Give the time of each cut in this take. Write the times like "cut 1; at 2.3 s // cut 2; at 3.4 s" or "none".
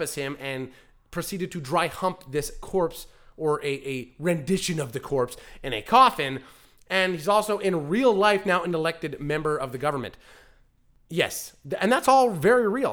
none